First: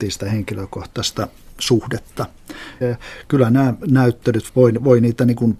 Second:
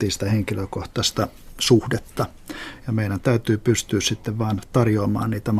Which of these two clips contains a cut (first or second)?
first